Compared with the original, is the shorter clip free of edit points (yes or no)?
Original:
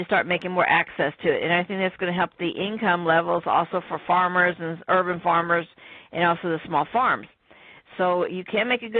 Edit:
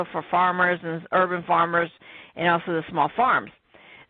yes